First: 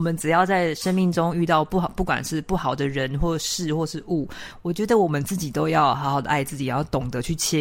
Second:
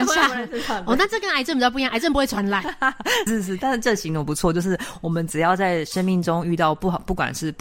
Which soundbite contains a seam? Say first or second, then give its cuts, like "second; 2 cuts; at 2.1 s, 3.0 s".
second; 1 cut; at 3.3 s